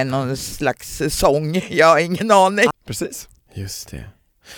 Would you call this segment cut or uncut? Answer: cut